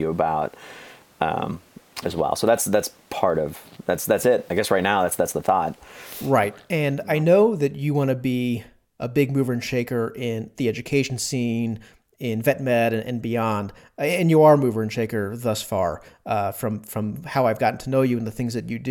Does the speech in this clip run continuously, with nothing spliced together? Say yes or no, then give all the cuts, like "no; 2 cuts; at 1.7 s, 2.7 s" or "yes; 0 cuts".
yes; 0 cuts